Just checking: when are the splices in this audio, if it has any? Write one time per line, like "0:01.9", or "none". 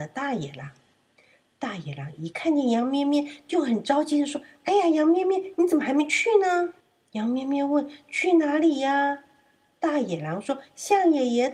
0:06.8